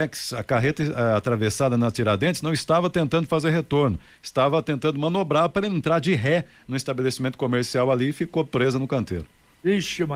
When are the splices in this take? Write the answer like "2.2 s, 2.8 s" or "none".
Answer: none

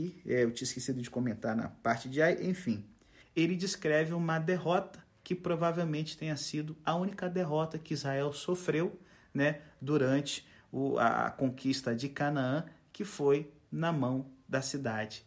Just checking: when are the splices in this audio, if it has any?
3.2 s

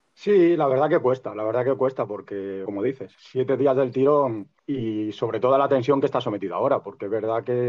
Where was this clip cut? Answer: 2.7 s, 4.6 s

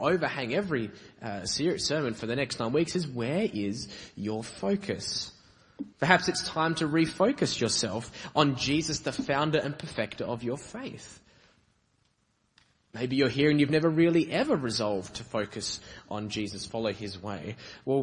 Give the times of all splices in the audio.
5.9 s

